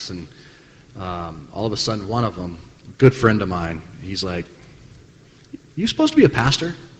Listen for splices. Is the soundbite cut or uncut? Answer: uncut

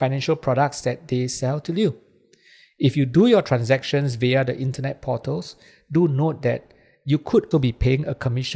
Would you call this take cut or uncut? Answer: cut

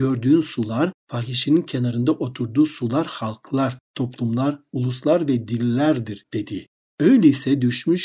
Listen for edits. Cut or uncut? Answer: uncut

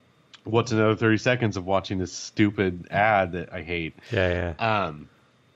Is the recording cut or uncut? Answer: uncut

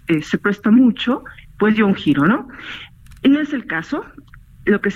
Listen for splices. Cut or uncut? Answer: uncut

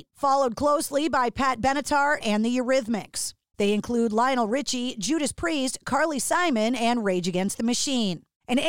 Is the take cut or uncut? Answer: cut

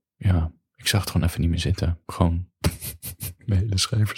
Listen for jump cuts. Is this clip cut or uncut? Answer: uncut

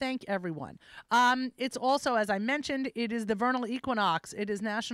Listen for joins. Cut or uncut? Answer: uncut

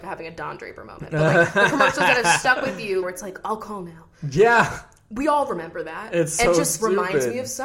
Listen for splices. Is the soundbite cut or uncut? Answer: cut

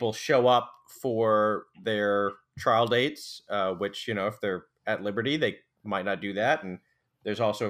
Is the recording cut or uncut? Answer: uncut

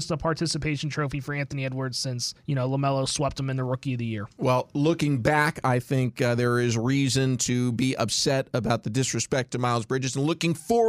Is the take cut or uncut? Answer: uncut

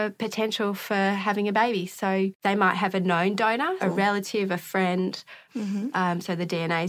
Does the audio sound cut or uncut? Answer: cut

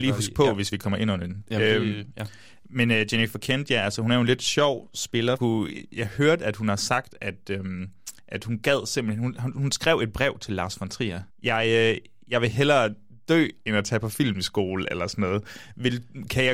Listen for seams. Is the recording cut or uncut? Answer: cut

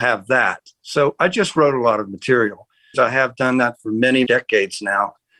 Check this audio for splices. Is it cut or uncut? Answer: cut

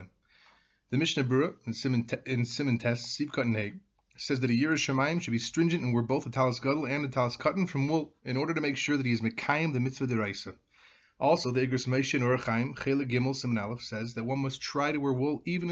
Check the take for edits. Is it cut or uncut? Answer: uncut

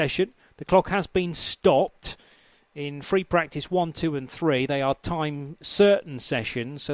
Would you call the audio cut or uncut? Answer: uncut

